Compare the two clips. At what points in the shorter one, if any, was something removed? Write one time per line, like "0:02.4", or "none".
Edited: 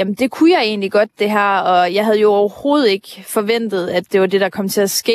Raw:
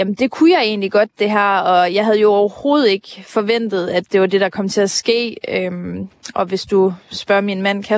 none

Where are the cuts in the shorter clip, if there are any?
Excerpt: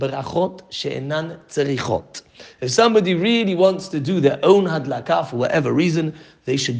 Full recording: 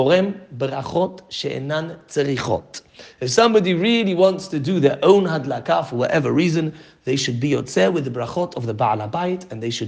none

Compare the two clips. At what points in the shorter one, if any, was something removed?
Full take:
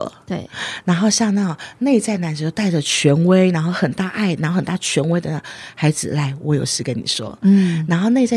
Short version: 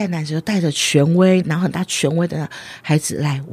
0:01.4

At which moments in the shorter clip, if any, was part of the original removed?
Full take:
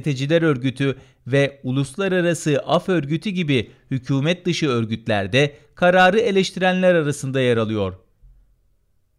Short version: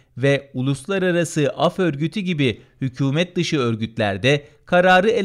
none

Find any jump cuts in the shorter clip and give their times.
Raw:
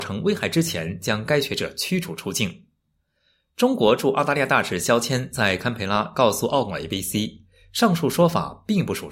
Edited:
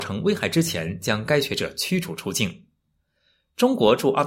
none

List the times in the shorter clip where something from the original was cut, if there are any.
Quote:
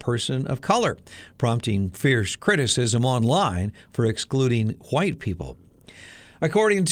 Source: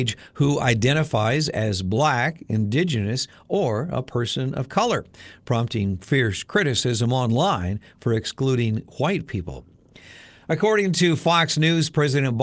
none

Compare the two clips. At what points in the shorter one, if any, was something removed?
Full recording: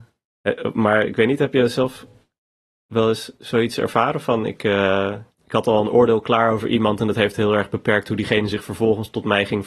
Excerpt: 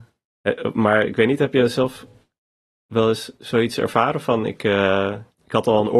none

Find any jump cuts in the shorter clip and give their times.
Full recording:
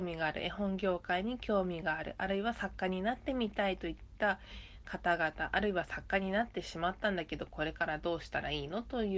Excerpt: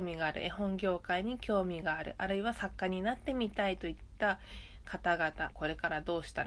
0:05.5

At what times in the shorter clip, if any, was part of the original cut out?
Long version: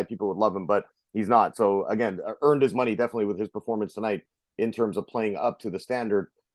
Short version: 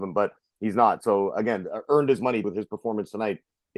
0:02.4

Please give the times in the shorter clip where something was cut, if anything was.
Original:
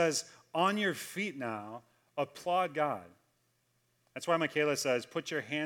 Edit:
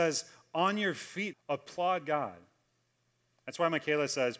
0:01.3

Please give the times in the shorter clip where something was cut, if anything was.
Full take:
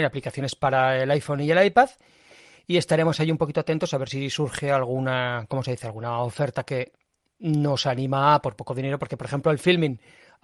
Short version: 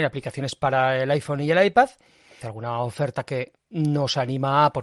0:02.4
0:03.6

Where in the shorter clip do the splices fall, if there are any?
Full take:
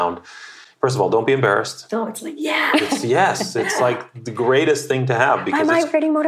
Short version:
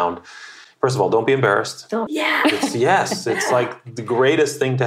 0:02.1

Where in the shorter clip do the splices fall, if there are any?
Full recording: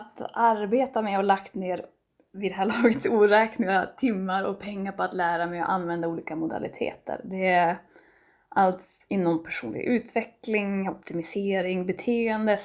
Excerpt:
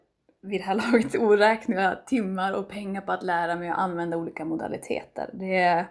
none

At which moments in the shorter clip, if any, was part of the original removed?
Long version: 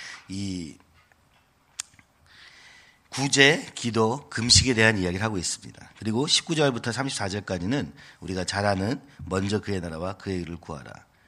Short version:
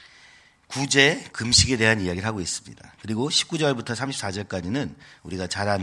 0:01.3

